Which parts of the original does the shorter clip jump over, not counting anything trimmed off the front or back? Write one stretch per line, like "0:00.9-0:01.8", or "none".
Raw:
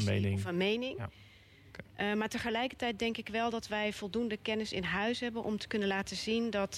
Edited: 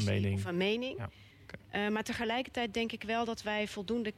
0:01.3-0:01.6